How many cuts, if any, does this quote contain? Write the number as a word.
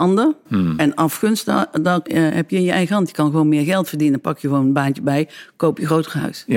one